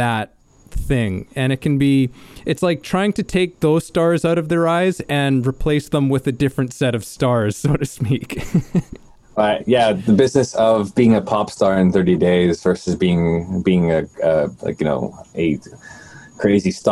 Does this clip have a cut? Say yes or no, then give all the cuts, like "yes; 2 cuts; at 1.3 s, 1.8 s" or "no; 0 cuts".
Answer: no; 0 cuts